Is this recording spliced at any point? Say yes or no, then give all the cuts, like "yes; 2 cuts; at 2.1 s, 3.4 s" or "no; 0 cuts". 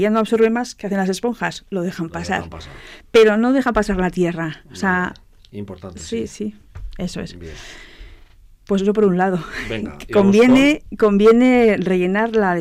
no; 0 cuts